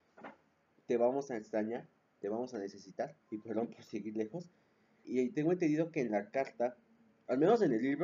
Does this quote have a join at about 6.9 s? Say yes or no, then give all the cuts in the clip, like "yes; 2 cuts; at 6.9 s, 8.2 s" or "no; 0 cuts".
no; 2 cuts; at 3.2 s, 5.0 s